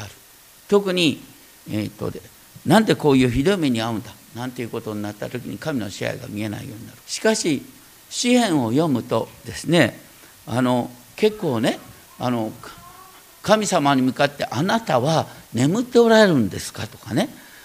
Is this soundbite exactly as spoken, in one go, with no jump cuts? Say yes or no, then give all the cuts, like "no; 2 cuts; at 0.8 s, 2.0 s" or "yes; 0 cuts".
no; 1 cut; at 7.0 s